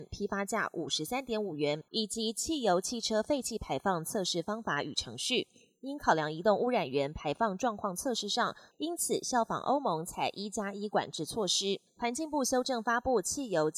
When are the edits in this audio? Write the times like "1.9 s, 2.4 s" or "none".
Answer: 1.9 s, 8.7 s, 11.9 s